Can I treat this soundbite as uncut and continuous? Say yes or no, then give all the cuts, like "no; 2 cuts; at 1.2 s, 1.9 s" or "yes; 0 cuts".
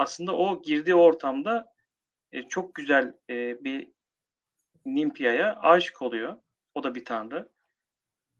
yes; 0 cuts